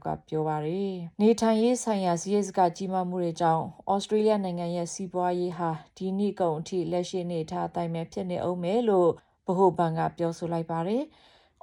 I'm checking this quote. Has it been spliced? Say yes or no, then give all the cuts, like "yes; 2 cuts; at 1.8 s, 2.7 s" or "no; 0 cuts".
yes; 1 cut; at 1.1 s